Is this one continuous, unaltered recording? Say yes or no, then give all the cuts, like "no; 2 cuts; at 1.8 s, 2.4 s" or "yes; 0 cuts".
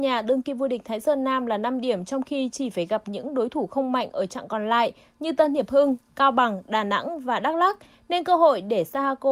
yes; 0 cuts